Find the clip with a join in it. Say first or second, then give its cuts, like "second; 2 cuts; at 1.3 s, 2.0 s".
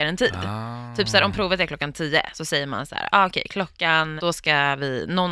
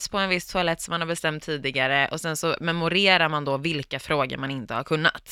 first; 1 cut; at 4.2 s